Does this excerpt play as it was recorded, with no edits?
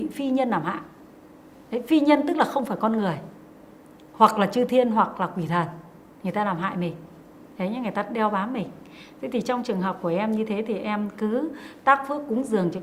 yes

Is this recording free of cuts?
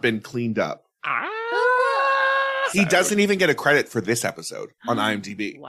no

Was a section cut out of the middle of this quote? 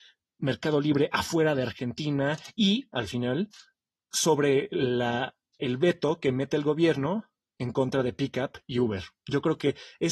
no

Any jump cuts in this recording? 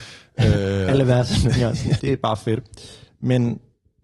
yes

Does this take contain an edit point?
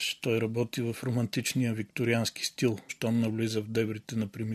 yes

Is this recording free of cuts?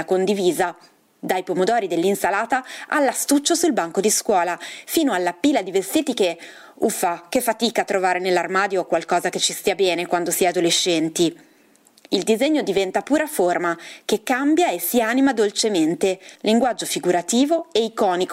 no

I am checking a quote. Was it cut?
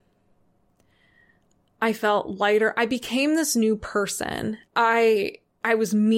yes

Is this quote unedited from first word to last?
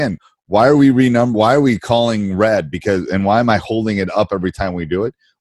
yes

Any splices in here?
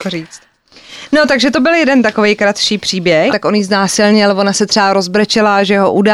yes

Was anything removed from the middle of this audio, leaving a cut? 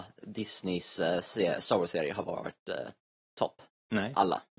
no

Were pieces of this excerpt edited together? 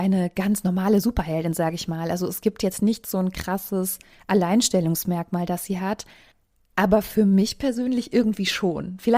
no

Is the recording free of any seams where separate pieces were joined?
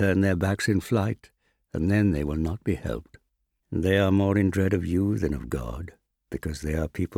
yes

